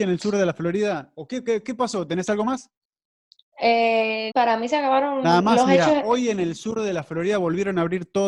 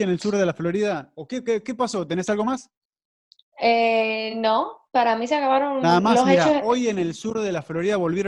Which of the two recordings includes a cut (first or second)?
first